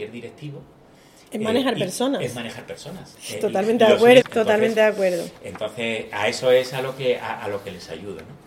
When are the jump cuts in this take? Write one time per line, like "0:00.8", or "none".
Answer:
0:04.2